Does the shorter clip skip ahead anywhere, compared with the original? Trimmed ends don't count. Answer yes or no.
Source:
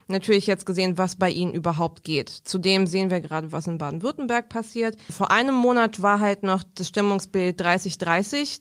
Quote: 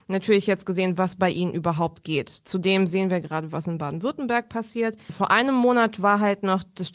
no